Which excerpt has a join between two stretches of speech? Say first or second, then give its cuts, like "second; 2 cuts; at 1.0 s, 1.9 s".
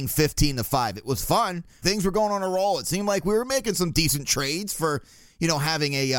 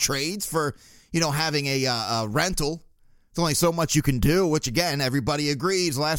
first; 1 cut; at 1.8 s